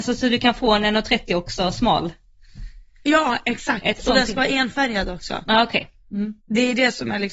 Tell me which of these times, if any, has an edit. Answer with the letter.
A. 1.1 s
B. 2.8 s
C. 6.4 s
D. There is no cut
C